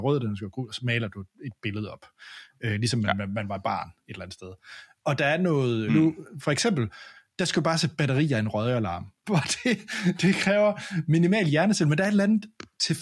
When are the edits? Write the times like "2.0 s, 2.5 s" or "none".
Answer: 5.9 s, 9.2 s